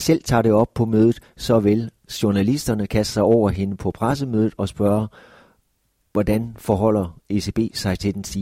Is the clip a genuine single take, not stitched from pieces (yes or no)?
yes